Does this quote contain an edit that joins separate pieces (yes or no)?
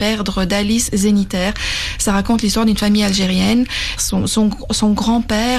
yes